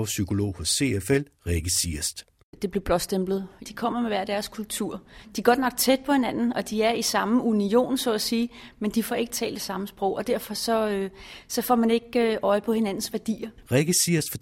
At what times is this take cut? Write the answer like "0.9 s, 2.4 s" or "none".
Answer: 3.7 s